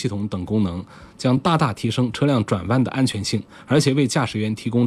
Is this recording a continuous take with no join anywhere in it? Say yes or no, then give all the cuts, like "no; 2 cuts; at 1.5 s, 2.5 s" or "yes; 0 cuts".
yes; 0 cuts